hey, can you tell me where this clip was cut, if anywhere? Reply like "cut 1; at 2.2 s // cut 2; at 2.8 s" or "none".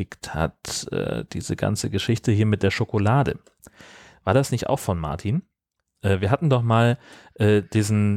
none